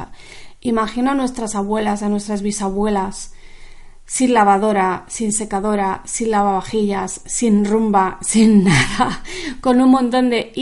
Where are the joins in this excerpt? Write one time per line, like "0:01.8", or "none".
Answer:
none